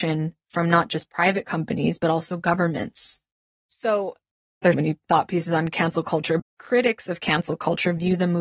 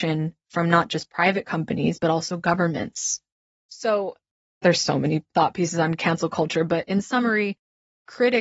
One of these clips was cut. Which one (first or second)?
first